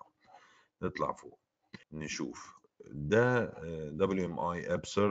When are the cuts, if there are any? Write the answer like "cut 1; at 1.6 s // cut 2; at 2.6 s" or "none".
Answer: cut 1; at 1.8 s